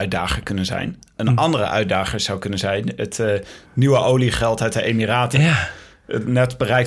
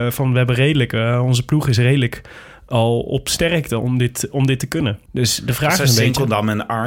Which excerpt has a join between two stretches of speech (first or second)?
second